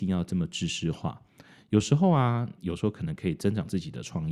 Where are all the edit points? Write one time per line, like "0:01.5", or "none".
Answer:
0:02.6